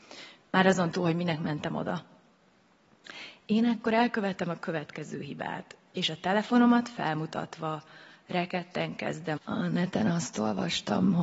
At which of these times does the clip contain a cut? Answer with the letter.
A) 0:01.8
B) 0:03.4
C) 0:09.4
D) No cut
C